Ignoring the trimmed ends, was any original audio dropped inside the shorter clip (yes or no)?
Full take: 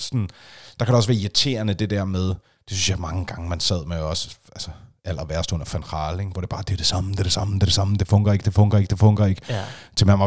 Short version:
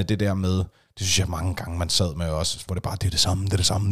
yes